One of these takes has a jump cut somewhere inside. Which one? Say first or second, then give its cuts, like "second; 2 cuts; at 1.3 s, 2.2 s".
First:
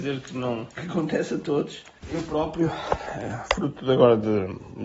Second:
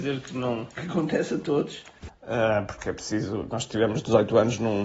second; 1 cut; at 2.1 s